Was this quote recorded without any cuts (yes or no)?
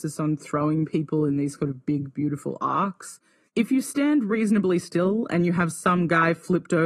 no